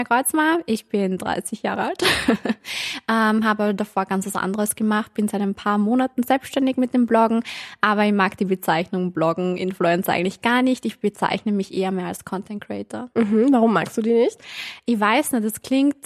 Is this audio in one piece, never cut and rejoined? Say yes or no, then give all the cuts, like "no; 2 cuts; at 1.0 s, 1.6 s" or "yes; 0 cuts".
yes; 0 cuts